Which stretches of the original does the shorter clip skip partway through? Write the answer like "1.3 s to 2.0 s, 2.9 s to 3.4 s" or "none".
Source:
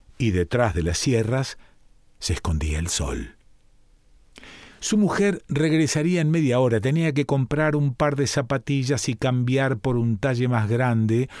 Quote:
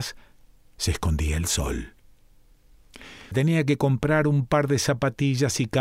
4.7 s to 6.8 s